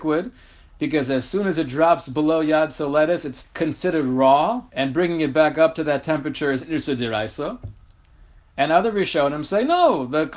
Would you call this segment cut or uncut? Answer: cut